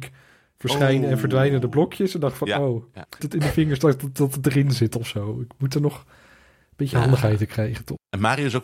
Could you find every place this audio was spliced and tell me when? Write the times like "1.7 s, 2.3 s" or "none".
3.2 s